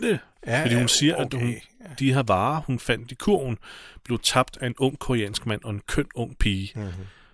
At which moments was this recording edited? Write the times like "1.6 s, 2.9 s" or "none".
none